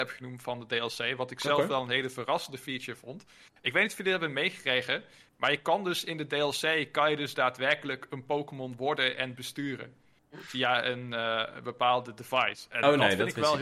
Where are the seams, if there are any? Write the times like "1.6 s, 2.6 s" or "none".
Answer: none